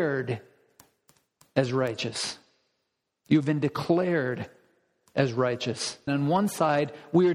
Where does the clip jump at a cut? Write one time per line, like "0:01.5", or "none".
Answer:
0:06.1